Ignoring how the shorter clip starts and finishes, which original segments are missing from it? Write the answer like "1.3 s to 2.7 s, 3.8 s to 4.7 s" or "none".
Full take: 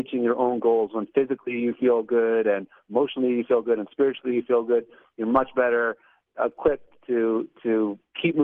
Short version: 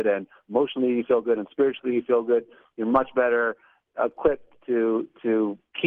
none